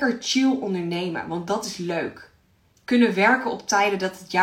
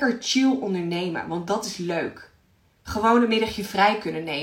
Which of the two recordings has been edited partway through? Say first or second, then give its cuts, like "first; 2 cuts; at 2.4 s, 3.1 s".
first; 1 cut; at 2.7 s